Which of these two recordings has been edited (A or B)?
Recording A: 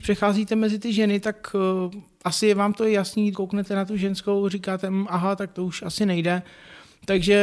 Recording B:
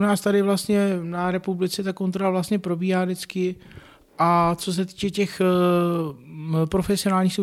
A